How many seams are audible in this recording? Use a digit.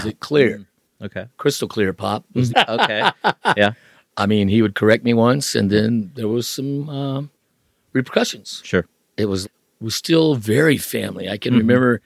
2